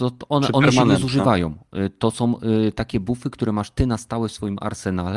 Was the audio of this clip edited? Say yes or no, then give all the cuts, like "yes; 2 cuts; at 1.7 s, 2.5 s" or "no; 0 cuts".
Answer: no; 0 cuts